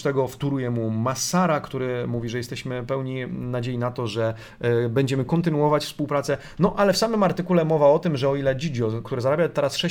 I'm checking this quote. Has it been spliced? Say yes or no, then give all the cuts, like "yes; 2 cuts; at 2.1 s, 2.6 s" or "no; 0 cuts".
no; 0 cuts